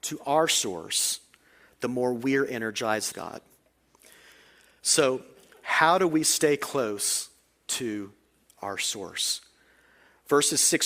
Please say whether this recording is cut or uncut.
cut